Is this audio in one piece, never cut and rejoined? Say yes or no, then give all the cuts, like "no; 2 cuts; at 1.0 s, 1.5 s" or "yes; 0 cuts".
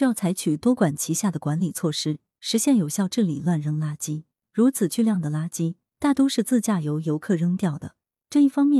no; 1 cut; at 4.4 s